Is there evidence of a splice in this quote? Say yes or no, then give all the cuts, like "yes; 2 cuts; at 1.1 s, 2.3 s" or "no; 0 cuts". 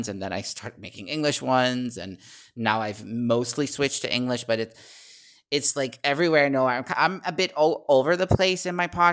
no; 0 cuts